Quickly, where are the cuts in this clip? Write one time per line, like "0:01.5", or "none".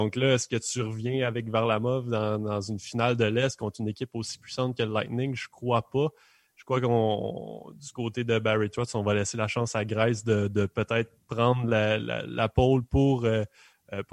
none